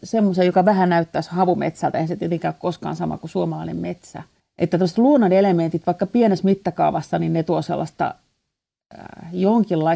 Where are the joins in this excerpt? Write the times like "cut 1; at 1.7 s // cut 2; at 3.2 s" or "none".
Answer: none